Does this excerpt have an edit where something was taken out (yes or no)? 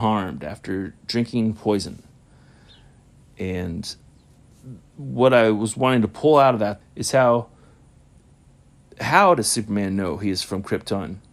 yes